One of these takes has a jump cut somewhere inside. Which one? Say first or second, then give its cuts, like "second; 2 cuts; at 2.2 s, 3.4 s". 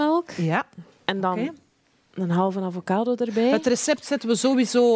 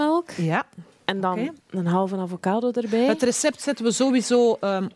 second; 1 cut; at 1.6 s